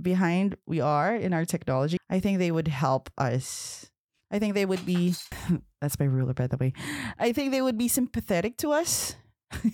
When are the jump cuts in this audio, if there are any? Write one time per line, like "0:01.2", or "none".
0:02.0
0:05.3